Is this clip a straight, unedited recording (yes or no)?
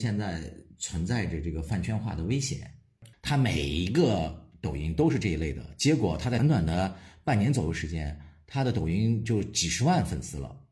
no